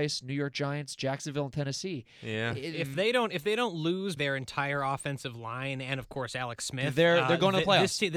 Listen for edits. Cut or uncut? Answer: cut